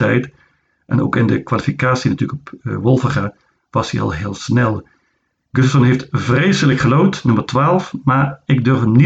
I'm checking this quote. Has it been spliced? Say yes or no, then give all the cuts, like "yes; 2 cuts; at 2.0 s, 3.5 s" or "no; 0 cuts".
no; 0 cuts